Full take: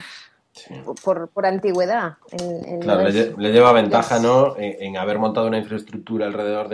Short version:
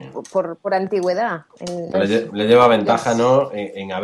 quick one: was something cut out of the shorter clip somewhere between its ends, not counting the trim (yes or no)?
yes